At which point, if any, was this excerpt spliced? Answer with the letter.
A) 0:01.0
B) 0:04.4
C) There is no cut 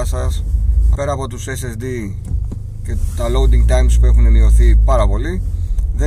A